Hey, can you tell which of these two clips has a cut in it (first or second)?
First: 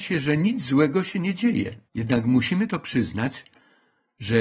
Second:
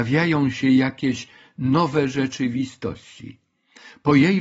first